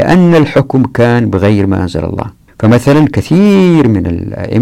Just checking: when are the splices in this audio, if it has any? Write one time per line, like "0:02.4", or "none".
0:02.5